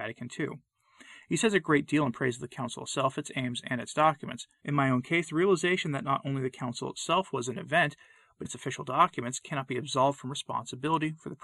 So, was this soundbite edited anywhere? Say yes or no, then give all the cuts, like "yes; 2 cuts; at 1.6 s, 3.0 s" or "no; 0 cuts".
yes; 2 cuts; at 4.6 s, 8.4 s